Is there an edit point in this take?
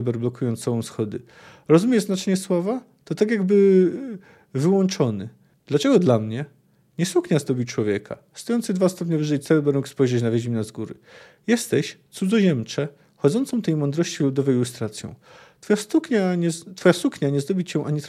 yes; 1 cut; at 5.5 s

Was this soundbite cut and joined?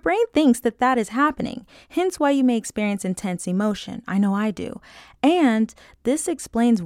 no; 0 cuts

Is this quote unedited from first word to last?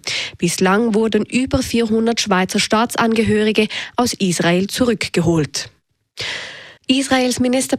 no; 1 cut; at 6.8 s

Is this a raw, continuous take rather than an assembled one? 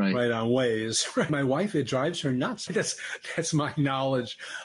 no; 2 cuts; at 1.3 s, 2.7 s

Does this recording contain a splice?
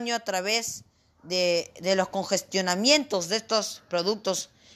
no; 0 cuts

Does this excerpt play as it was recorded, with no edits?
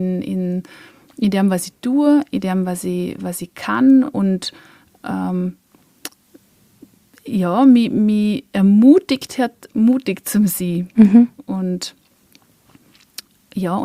yes; 0 cuts

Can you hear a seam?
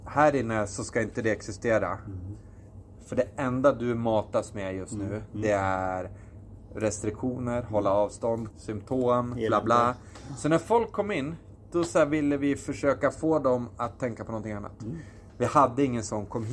yes; 2 cuts; at 8.5 s, 15.3 s

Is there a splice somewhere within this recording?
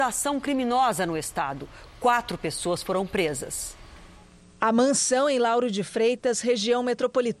no; 0 cuts

